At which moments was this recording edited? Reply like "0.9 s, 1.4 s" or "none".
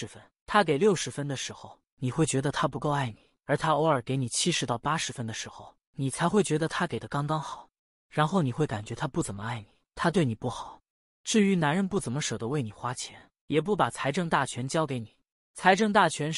none